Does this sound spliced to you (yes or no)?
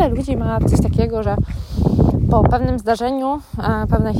no